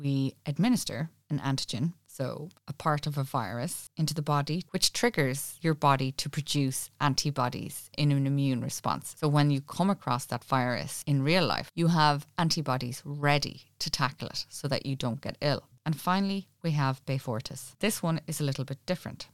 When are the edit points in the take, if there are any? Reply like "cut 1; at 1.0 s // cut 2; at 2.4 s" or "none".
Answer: cut 1; at 15.7 s